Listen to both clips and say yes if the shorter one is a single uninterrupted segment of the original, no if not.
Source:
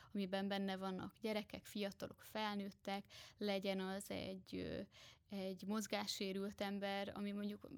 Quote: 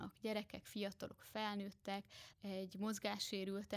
no